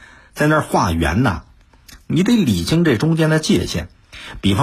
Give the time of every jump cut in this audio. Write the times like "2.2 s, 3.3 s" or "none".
2.0 s

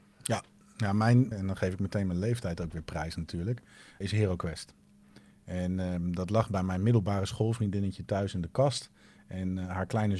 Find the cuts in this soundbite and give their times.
1.3 s, 4.0 s

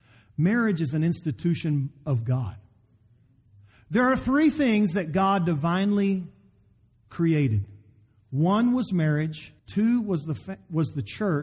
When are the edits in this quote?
9.6 s

